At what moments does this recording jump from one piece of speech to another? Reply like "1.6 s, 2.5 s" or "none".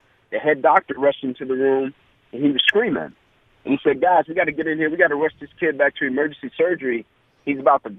none